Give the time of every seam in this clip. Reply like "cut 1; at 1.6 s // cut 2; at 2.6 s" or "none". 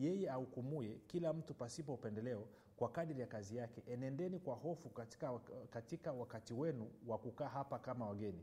none